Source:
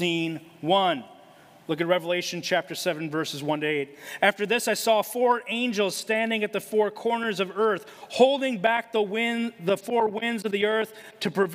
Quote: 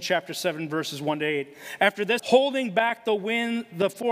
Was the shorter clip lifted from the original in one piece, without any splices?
no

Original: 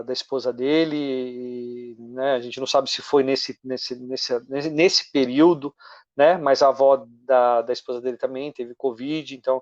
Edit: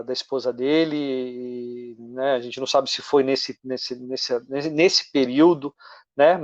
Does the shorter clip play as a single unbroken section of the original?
yes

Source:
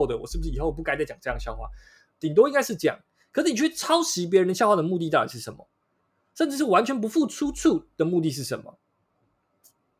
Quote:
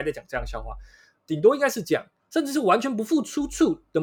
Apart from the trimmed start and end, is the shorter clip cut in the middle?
yes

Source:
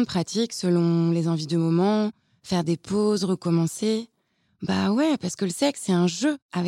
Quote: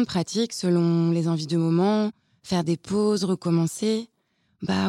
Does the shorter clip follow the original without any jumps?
yes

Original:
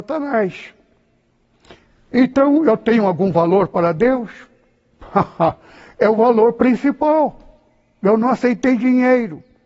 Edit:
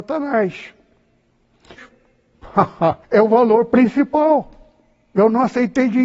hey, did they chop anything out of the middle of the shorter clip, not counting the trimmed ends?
yes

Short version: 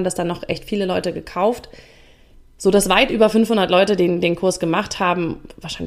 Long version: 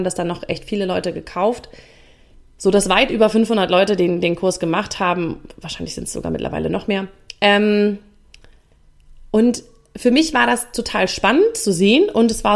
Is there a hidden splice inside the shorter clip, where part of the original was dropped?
no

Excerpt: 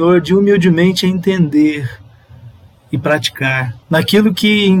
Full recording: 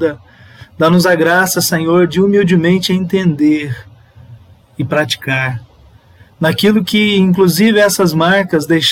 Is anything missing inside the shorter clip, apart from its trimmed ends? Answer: yes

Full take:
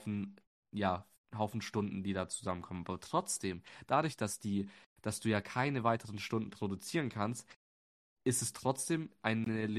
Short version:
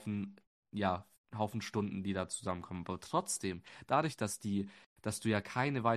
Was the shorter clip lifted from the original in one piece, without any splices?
yes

